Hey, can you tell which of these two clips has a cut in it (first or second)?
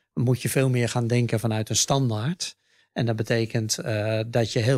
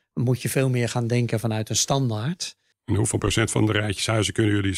second